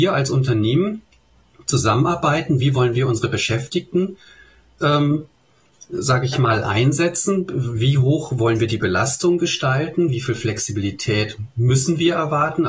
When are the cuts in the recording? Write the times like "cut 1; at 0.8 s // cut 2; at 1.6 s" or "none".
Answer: none